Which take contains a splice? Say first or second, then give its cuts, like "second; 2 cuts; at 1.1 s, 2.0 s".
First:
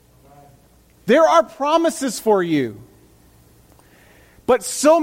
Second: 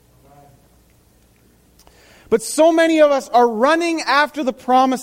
first; 1 cut; at 1.0 s